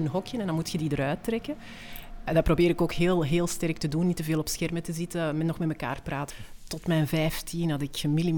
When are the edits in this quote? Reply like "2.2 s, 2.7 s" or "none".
6.3 s